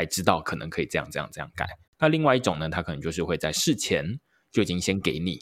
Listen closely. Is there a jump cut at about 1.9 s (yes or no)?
yes